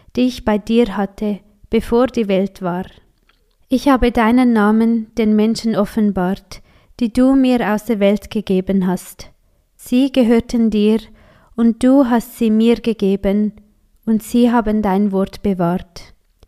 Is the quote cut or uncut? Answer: uncut